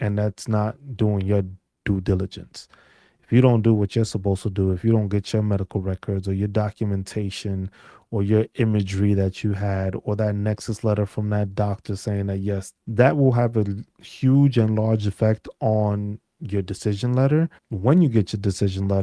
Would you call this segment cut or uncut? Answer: cut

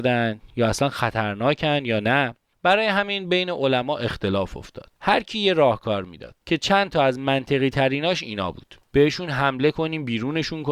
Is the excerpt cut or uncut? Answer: cut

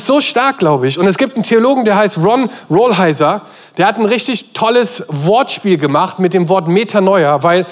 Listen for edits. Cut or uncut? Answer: uncut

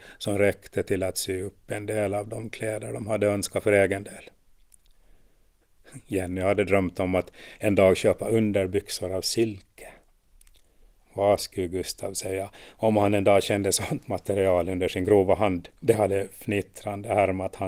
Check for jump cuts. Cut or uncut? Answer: cut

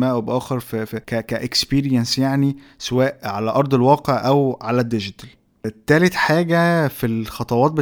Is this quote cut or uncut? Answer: cut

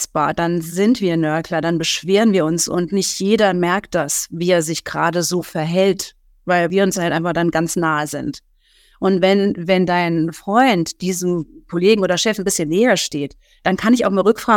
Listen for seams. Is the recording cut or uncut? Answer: uncut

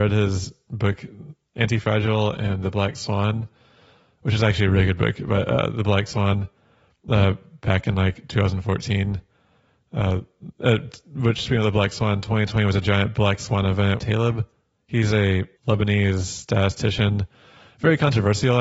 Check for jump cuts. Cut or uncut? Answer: cut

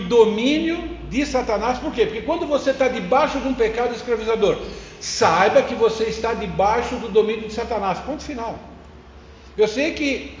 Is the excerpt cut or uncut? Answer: uncut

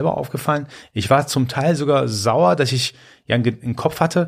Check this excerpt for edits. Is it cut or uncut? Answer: uncut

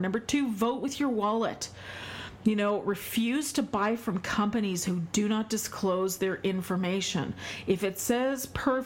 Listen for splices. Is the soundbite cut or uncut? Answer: uncut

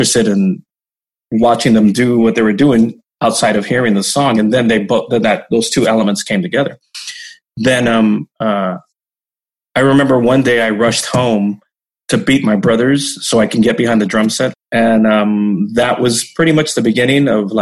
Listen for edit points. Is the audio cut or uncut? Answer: cut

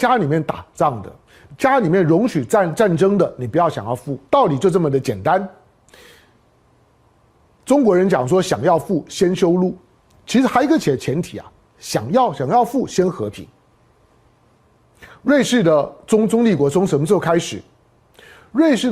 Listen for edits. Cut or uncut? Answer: cut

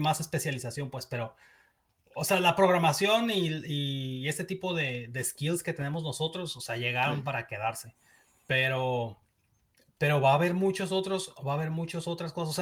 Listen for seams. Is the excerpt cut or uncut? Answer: uncut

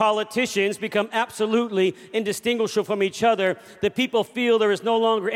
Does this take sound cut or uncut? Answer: uncut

